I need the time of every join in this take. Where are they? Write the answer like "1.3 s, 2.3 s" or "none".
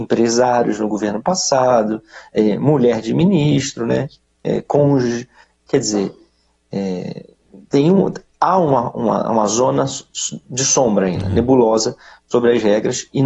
none